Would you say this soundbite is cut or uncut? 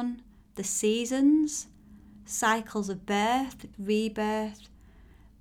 cut